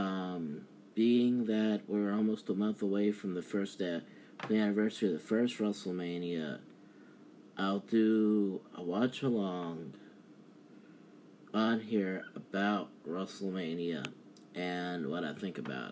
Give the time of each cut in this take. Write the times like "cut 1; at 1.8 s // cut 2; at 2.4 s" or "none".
none